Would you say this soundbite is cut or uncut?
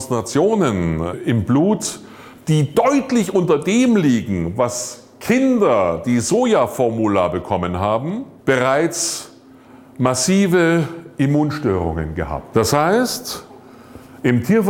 cut